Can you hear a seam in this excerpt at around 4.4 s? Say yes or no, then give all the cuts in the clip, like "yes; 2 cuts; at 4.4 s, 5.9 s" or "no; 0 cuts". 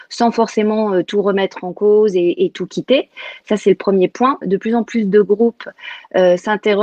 yes; 1 cut; at 4.4 s